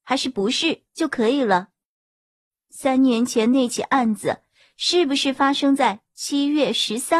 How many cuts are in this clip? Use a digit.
0